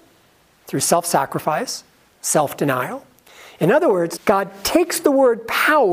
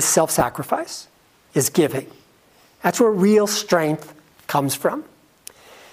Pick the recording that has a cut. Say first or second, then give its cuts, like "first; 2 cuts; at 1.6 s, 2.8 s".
first; 1 cut; at 4.2 s